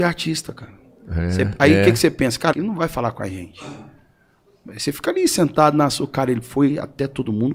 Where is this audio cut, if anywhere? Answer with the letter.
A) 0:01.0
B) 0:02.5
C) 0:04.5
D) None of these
B